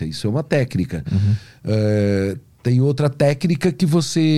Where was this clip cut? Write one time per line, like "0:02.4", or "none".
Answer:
none